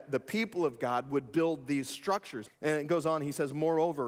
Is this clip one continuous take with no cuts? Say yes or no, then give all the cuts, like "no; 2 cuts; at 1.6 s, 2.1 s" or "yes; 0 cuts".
no; 1 cut; at 2.4 s